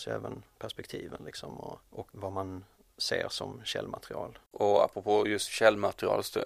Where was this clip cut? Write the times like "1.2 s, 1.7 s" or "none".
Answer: 1.9 s, 4.5 s